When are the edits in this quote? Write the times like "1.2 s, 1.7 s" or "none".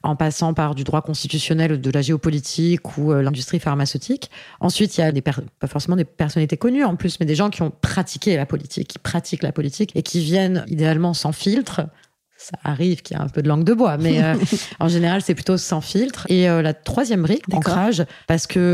16.2 s, 17.4 s